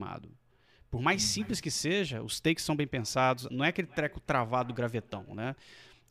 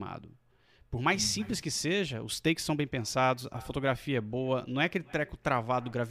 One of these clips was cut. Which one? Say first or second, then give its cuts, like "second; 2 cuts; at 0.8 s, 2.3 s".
first; 1 cut; at 3.5 s